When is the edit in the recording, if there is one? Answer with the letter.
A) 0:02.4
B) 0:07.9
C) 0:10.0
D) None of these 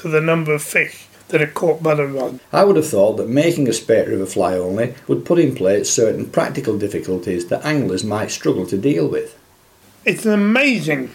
A